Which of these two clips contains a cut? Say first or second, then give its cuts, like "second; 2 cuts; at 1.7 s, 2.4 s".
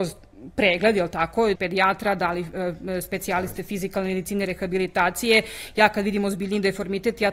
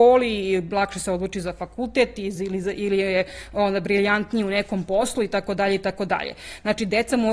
first; 1 cut; at 1.6 s